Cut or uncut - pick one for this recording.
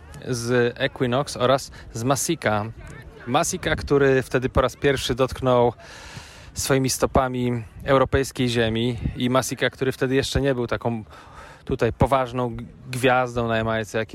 uncut